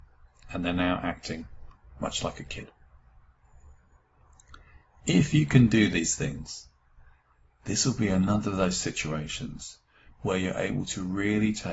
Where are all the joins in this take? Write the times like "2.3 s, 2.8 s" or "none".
none